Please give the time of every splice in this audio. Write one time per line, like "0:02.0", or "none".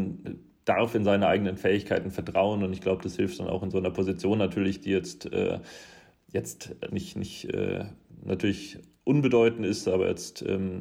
0:06.9